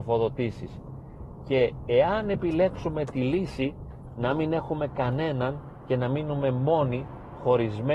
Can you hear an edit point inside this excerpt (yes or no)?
no